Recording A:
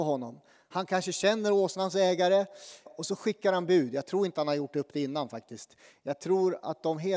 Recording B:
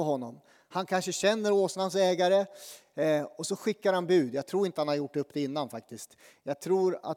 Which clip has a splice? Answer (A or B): A